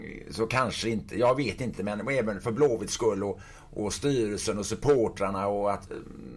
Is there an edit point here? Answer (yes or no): no